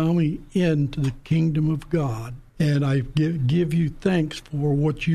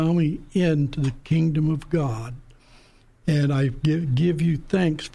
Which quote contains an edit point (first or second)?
first